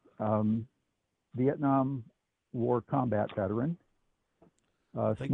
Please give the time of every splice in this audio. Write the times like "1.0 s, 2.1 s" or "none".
none